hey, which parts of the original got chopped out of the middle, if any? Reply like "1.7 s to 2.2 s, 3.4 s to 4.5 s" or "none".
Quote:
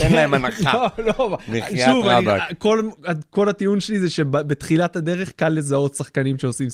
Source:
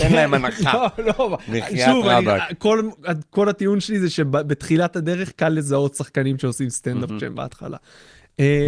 none